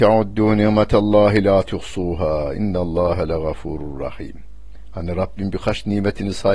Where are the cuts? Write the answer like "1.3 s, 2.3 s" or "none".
none